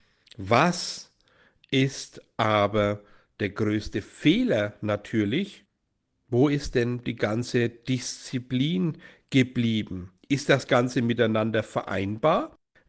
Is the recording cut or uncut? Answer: cut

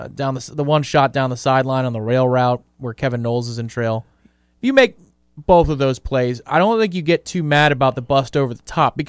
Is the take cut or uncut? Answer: uncut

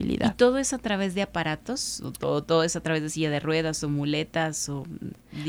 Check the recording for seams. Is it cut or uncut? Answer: uncut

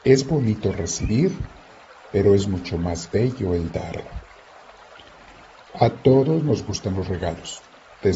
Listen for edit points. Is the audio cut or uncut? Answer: uncut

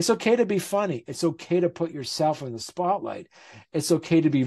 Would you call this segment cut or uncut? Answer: uncut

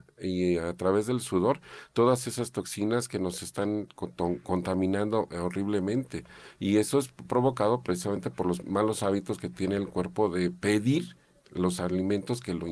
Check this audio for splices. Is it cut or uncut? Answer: cut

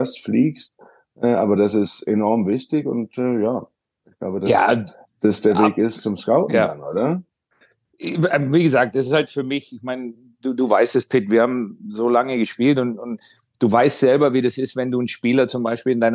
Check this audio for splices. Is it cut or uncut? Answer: uncut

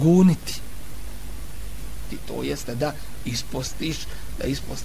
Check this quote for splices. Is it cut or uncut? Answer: cut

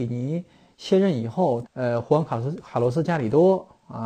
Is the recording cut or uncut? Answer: cut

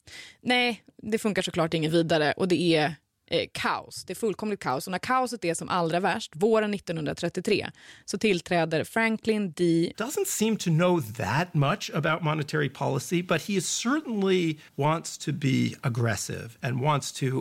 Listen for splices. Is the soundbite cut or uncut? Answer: cut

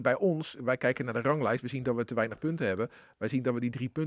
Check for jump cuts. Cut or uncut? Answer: uncut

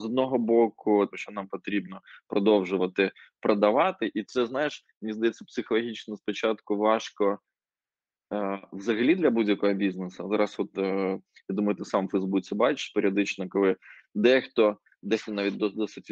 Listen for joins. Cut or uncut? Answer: cut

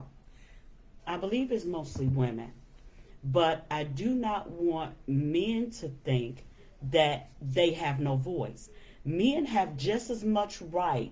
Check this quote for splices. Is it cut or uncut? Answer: cut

